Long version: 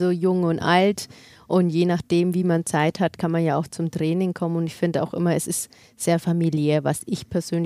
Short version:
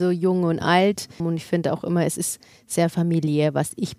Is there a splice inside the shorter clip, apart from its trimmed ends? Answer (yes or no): yes